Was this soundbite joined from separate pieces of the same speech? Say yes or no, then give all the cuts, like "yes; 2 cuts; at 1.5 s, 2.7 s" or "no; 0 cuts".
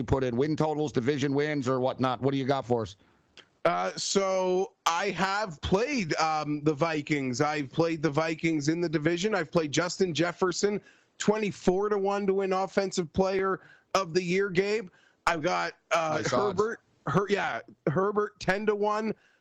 no; 0 cuts